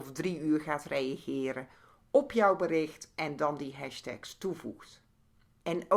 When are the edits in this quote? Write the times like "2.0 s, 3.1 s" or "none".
none